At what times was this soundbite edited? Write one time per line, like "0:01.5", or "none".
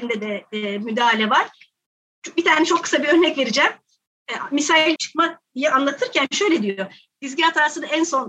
0:05.0
0:07.1